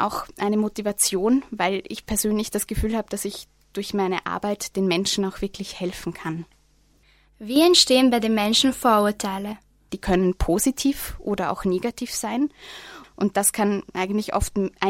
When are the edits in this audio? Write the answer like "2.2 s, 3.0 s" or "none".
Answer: 9.9 s, 13.0 s